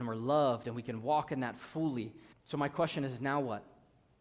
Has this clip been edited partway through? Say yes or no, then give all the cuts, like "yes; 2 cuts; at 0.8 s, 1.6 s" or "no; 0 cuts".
yes; 1 cut; at 2.3 s